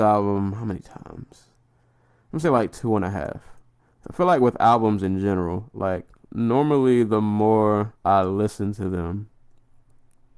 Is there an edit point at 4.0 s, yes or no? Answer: yes